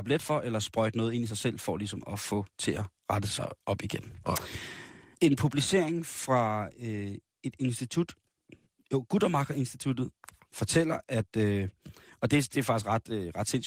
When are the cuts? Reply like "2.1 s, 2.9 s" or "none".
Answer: none